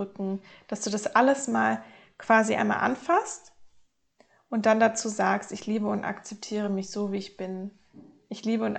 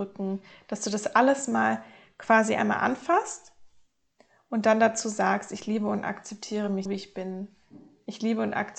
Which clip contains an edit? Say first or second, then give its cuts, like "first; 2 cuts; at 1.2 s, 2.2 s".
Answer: second; 1 cut; at 6.9 s